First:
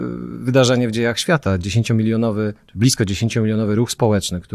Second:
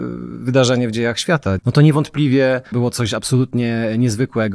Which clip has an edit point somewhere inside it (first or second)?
second